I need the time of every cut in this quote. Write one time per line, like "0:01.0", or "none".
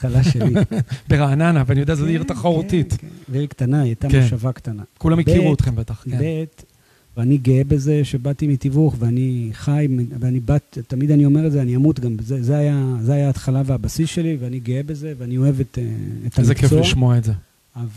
0:07.2